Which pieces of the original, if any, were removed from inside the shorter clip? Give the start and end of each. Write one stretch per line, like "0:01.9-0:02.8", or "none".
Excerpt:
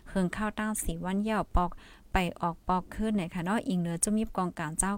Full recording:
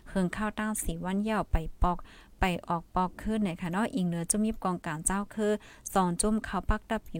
0:01.5-0:01.8